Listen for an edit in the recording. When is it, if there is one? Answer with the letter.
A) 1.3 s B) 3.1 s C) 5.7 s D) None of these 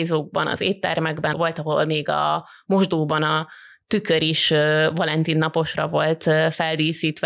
A